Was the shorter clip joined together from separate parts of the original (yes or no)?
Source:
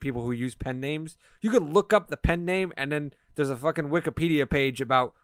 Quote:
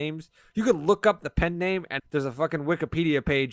yes